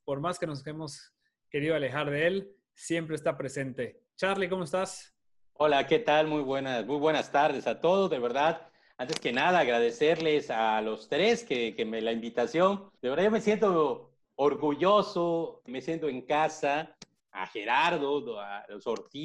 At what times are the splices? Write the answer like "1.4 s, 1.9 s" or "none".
13.0 s, 15.7 s, 17.2 s